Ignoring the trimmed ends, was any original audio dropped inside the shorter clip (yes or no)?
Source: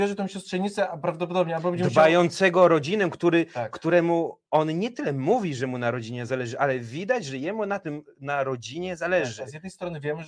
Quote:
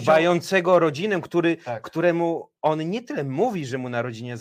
no